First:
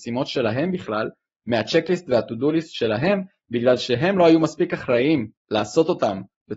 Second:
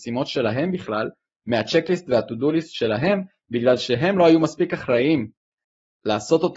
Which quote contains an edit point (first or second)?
first